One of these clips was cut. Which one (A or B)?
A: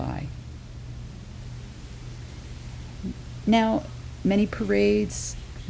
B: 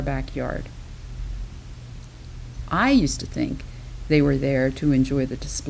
A